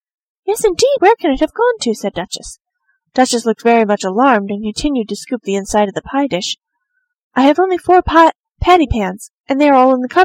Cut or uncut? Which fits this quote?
cut